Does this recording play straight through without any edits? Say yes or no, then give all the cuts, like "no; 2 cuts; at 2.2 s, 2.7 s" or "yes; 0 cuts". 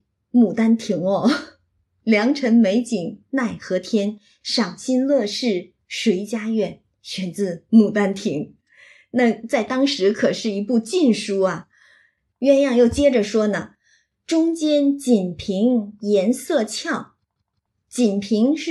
no; 1 cut; at 12.3 s